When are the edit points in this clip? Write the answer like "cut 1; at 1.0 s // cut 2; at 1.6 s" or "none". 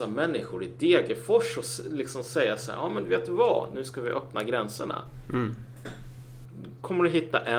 none